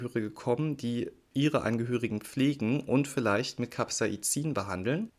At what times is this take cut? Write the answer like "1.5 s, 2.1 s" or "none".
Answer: none